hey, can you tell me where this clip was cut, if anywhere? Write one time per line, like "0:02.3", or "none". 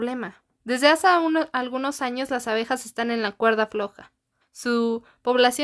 0:04.4